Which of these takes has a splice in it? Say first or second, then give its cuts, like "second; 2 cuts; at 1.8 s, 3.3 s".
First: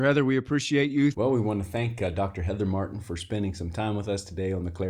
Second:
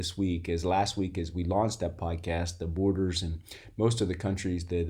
first; 1 cut; at 1.1 s